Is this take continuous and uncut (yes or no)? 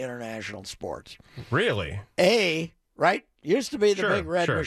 no